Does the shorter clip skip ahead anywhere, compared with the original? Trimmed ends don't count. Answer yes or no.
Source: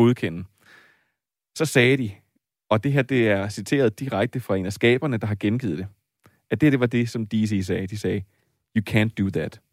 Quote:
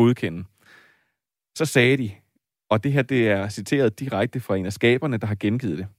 no